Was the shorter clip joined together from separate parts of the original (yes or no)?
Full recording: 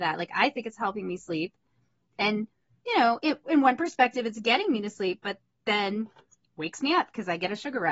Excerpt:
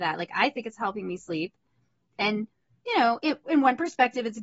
no